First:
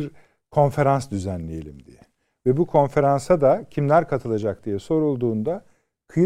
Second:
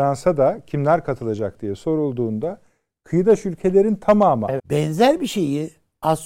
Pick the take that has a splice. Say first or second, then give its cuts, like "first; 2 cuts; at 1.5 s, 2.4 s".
second; 1 cut; at 4.6 s